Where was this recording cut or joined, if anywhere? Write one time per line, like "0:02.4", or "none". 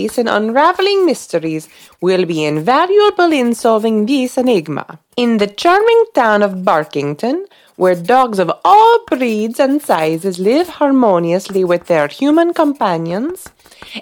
0:05.1